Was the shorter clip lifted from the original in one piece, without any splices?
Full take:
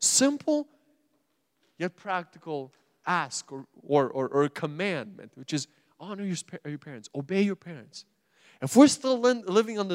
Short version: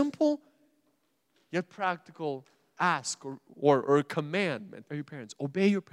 no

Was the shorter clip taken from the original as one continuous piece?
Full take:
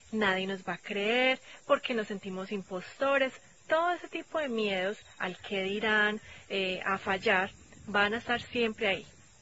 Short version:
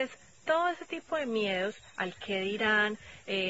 yes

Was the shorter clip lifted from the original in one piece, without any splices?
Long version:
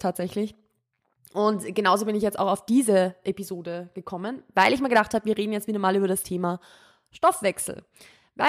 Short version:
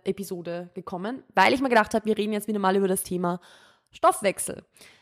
yes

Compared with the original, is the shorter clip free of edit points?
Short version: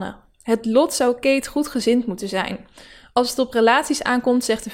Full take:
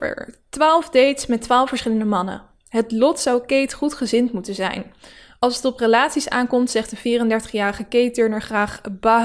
yes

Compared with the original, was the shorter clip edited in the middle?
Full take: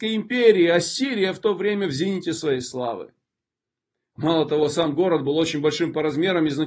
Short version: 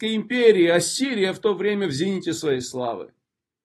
no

